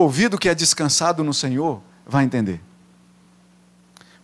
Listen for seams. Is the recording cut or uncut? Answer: uncut